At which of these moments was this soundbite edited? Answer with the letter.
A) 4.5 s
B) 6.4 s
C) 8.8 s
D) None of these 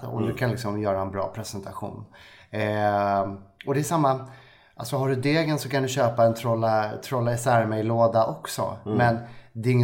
D